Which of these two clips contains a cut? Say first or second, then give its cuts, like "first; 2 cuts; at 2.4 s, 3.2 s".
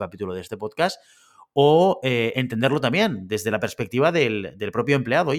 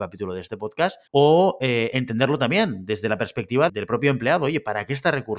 second; 2 cuts; at 1.1 s, 3.7 s